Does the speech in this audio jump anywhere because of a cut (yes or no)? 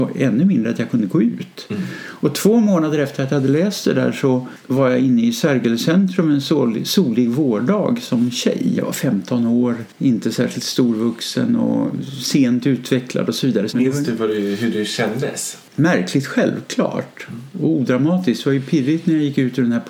yes